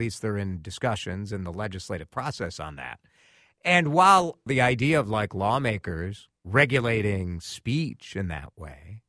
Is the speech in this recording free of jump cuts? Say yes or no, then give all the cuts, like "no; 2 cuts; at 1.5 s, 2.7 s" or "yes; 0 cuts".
no; 2 cuts; at 4.5 s, 6.4 s